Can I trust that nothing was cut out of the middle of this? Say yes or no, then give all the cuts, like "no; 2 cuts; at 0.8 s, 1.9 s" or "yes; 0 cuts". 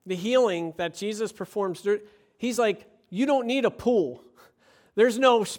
yes; 0 cuts